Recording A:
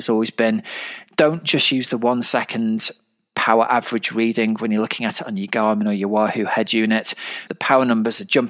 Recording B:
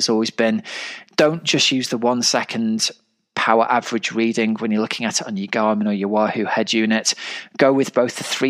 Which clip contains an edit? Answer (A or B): A